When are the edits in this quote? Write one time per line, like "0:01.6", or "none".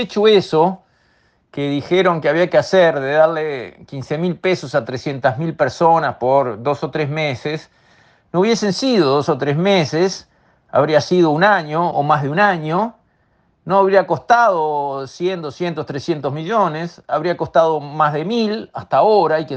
0:11.9